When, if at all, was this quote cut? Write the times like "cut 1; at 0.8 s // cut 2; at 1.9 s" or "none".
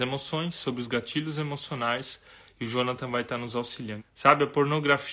cut 1; at 4.0 s